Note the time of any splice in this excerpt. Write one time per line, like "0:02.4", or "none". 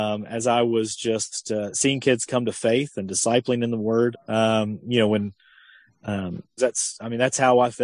0:04.1
0:06.6